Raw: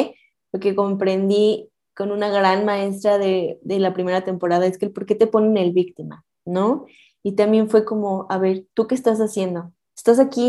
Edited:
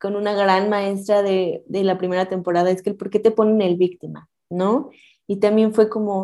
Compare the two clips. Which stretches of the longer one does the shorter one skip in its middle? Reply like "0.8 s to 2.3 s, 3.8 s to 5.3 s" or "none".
none

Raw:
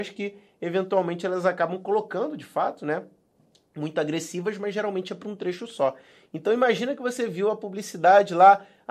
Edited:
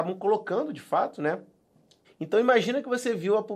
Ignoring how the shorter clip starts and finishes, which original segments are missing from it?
3.7 s to 6.2 s

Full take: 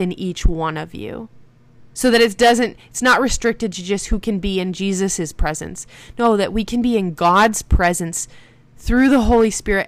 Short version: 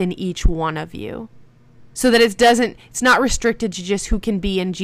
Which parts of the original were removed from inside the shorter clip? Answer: none

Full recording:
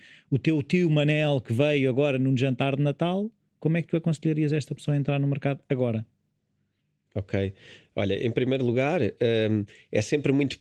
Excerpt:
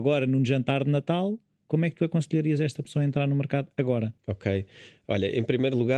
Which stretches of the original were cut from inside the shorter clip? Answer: 6.1 s to 7.1 s

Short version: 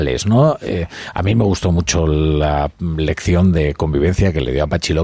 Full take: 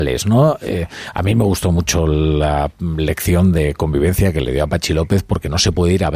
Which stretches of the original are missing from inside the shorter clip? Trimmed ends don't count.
none

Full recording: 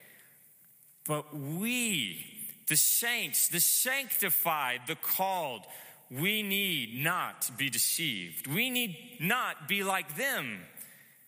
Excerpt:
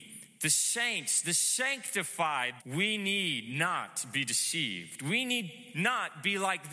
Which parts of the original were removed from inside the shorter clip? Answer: 4.8 s to 6.0 s

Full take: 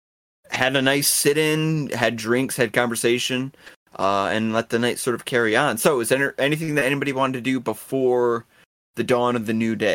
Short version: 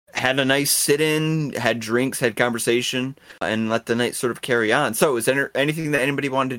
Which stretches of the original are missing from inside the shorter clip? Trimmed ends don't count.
3.8 s to 4.2 s

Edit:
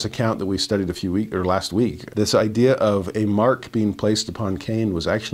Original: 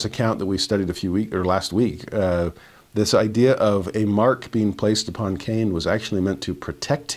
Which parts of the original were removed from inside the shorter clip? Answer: 2.1 s to 2.9 s

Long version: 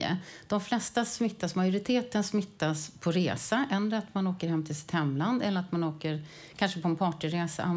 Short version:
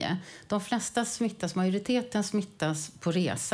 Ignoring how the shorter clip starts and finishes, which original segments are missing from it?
none

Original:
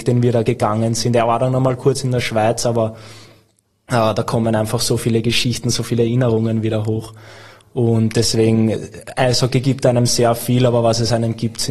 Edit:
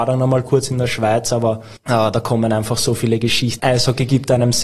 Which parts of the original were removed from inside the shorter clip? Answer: 3.1 s to 3.8 s, 5.6 s to 9.1 s

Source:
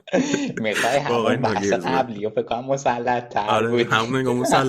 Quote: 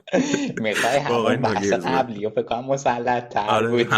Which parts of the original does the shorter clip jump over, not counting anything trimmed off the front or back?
none

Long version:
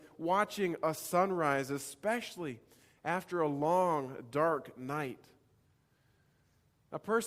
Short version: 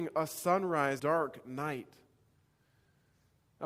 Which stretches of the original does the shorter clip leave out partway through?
1.7 s to 4.3 s

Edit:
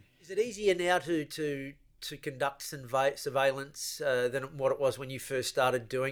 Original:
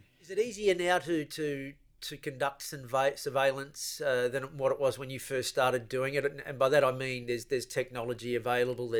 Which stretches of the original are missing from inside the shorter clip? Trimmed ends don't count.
none

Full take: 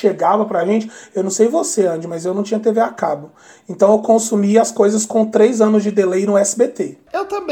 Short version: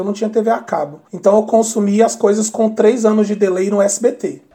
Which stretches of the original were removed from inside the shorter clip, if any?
3.4 s to 3.6 s

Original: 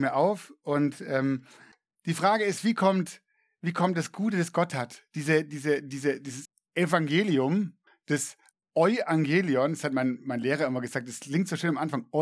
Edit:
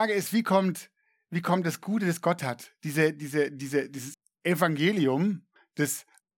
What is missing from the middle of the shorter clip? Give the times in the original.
none

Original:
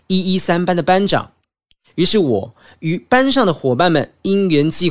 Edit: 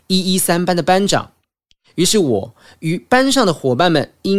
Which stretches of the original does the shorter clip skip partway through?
none

